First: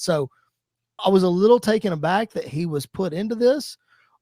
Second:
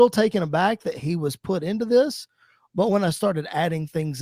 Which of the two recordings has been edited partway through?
first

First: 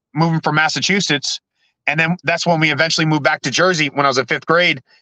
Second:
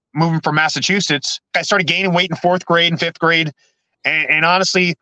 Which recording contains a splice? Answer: second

